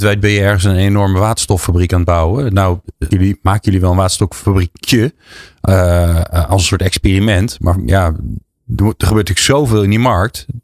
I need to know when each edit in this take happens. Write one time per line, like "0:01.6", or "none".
0:03.1